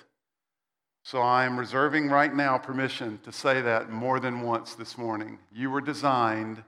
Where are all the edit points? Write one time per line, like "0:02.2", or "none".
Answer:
none

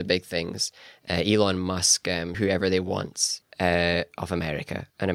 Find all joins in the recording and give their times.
0:02.3
0:03.4

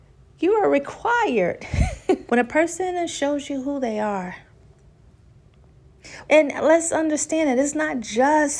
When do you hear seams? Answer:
0:02.3
0:06.3

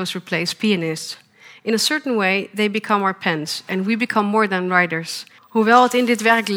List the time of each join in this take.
0:05.4

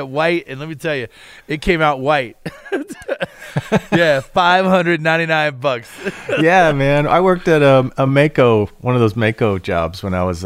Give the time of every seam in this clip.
none

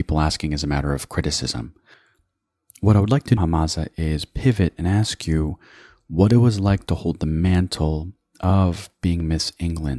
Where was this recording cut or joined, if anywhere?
0:03.4

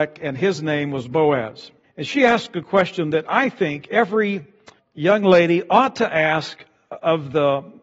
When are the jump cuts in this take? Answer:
0:01.8
0:04.8

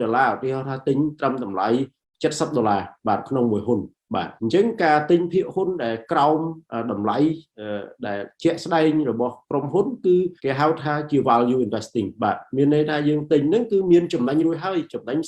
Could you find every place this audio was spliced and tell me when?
0:04.4
0:10.4

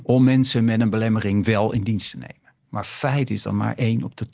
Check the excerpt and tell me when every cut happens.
0:02.6

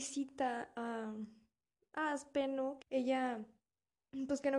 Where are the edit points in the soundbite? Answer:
0:02.8

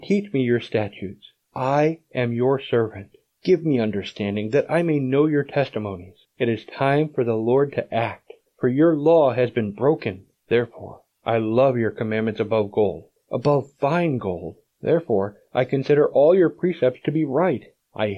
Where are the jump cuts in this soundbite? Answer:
none

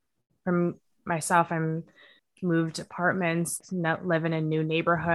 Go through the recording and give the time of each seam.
none

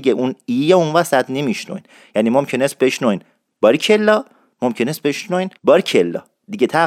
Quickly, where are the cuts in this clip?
0:05.6

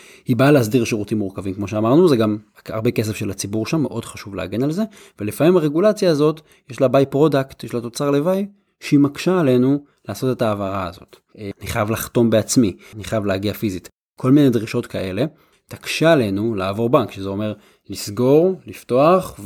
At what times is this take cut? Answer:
0:11.5
0:12.9
0:15.5

